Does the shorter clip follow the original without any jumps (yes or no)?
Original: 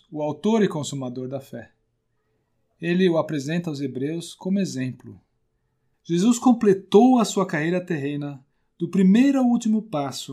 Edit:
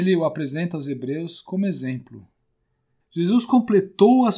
yes